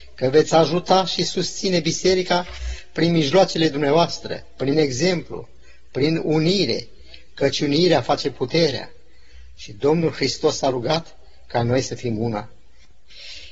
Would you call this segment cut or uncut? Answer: uncut